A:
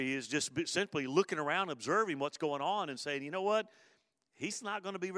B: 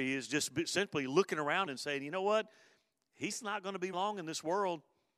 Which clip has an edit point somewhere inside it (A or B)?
B